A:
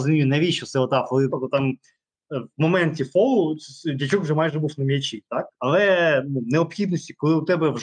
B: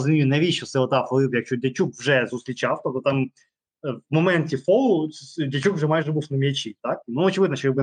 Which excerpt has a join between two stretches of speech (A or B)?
A